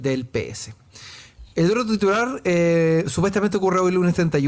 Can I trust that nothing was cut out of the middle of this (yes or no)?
yes